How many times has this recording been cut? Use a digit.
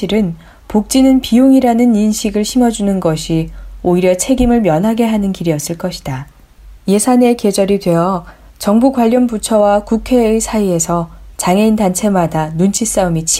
1